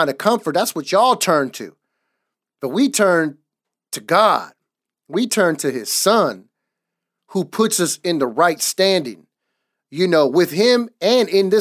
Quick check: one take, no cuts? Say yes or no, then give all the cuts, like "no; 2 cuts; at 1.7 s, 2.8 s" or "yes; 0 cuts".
yes; 0 cuts